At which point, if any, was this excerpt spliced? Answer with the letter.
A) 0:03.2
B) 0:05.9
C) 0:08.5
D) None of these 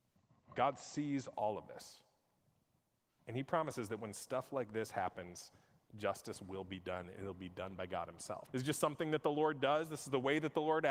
C